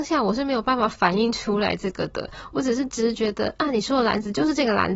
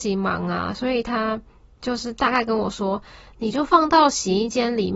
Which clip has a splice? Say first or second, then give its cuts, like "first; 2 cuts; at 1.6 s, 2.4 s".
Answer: first; 1 cut; at 3.1 s